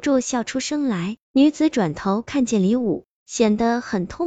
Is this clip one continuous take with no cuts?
no; 1 cut; at 1.2 s

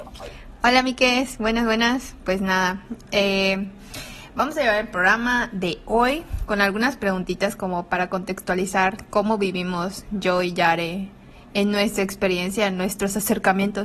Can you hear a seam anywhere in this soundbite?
no; 0 cuts

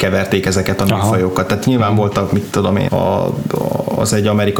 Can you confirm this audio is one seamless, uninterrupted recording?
no; 1 cut; at 2.9 s

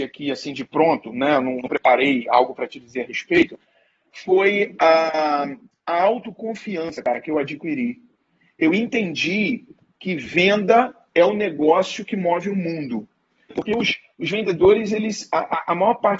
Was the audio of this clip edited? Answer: yes; 1 cut; at 13.5 s

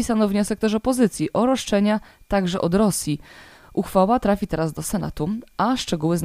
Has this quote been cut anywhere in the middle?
no; 0 cuts

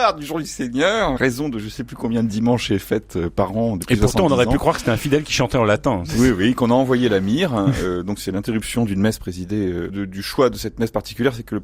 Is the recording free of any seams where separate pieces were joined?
no; 2 cuts; at 1.2 s, 9.9 s

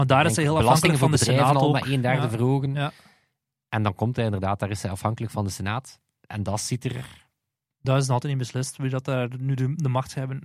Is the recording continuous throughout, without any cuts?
yes; 0 cuts

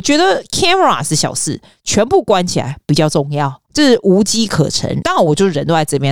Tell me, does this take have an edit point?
yes; 2 cuts; at 3.7 s, 5.0 s

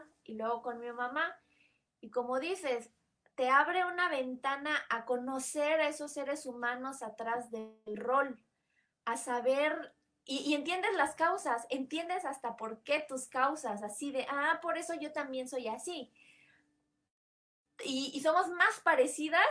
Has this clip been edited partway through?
no; 0 cuts

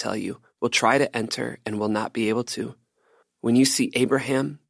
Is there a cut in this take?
yes; 1 cut; at 3.2 s

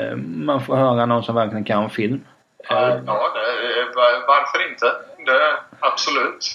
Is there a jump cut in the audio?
no; 0 cuts

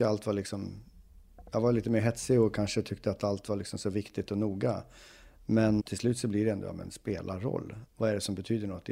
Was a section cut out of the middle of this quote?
yes; 2 cuts; at 5.8 s, 7.9 s

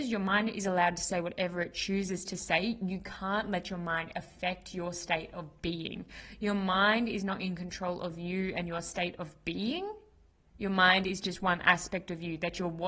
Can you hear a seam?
no; 0 cuts

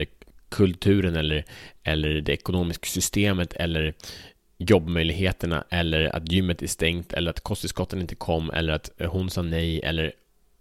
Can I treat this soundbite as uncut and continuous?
yes; 0 cuts

